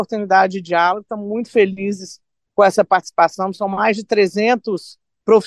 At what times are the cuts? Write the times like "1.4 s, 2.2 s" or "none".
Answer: none